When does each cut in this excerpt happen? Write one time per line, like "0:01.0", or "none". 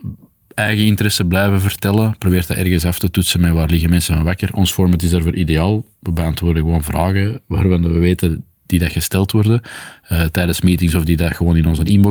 none